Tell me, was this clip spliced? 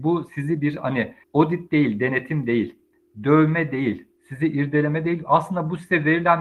yes; 1 cut; at 1.2 s

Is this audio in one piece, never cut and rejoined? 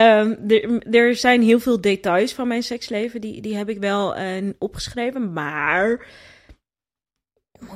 yes; 0 cuts

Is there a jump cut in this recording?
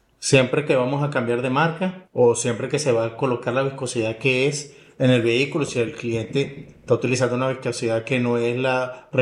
yes; 1 cut; at 2.1 s

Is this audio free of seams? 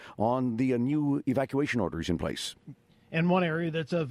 yes; 0 cuts

